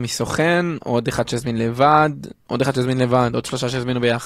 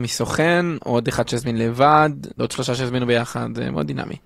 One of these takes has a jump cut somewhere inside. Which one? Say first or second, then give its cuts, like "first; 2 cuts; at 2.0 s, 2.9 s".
second; 1 cut; at 2.4 s